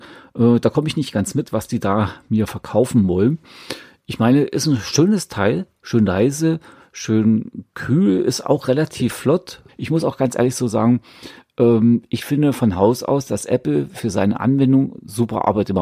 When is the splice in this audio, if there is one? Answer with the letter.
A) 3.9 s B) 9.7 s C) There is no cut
B